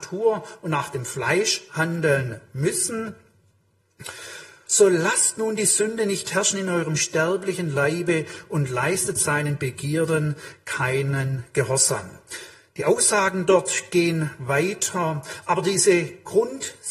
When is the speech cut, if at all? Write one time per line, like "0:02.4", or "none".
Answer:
0:04.7